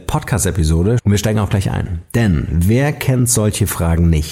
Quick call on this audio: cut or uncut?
cut